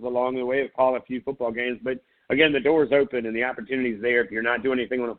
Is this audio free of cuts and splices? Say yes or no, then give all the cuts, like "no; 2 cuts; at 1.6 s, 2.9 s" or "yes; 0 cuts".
yes; 0 cuts